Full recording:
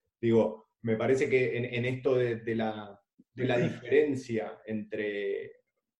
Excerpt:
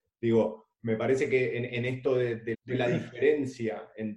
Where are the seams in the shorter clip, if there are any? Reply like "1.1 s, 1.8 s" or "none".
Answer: 2.5 s